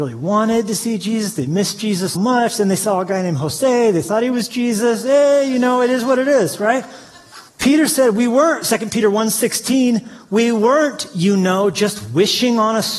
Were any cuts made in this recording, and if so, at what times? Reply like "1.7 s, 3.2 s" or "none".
2.1 s, 7.5 s